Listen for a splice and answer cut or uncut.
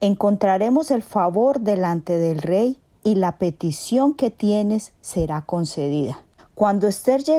cut